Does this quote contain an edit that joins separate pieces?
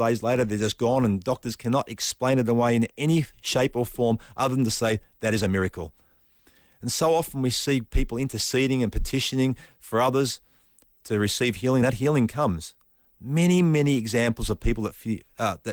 no; 0 cuts

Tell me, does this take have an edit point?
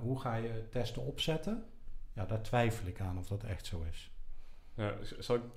no; 0 cuts

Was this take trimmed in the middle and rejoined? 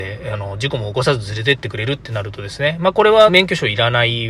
yes; 1 cut; at 3.3 s

